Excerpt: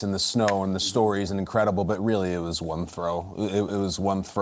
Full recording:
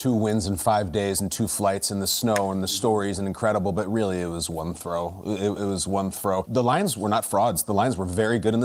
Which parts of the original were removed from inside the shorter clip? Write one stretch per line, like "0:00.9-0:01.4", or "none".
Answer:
none